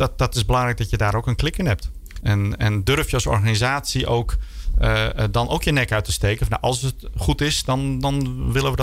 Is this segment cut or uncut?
cut